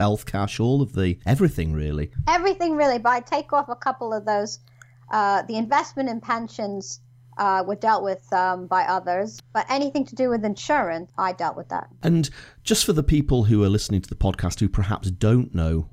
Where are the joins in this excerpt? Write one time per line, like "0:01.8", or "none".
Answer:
0:09.4
0:11.1